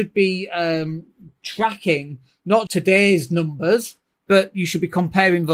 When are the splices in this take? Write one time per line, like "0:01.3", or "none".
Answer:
0:02.7